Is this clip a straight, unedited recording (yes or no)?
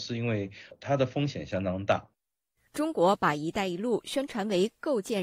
yes